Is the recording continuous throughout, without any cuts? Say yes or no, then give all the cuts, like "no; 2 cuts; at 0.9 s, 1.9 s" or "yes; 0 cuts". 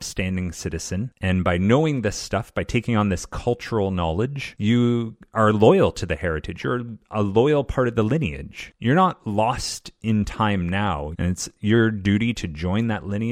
no; 1 cut; at 11.1 s